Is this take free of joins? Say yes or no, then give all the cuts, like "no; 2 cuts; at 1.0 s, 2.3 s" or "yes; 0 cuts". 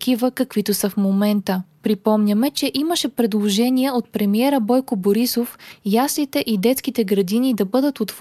yes; 0 cuts